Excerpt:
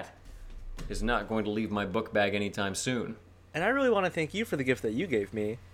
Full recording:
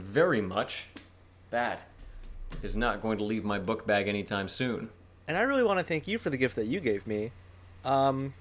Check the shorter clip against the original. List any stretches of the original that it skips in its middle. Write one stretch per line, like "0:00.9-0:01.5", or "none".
none